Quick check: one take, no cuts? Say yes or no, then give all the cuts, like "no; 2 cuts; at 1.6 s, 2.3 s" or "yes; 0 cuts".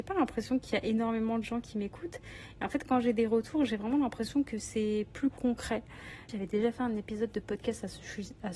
no; 1 cut; at 6.3 s